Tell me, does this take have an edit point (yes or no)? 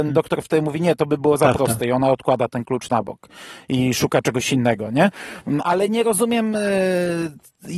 no